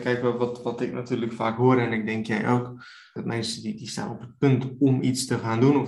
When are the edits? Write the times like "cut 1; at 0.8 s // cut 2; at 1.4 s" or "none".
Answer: cut 1; at 3.2 s